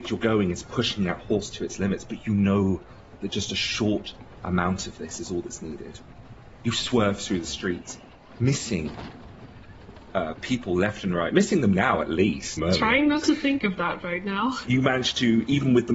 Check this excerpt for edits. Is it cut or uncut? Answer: cut